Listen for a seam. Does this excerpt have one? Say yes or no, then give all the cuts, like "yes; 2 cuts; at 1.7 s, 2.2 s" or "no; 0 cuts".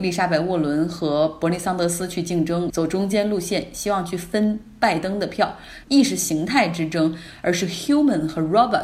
yes; 2 cuts; at 2.7 s, 5.8 s